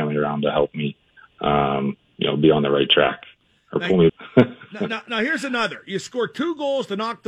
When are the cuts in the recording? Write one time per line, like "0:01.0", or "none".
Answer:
0:04.1